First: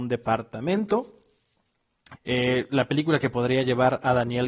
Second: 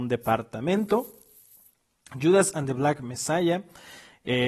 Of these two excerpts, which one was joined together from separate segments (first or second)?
first